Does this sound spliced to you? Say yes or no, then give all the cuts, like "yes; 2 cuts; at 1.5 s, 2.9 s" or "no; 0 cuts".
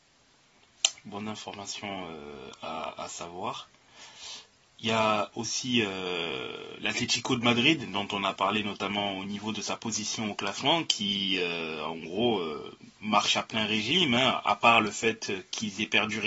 no; 0 cuts